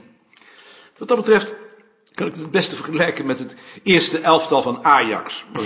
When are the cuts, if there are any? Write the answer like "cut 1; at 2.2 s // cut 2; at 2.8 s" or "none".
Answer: cut 1; at 1.0 s